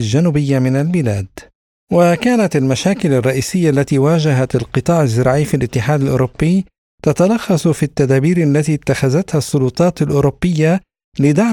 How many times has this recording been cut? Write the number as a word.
one